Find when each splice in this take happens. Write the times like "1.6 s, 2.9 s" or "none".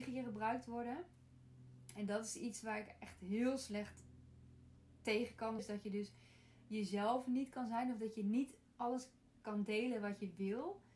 5.6 s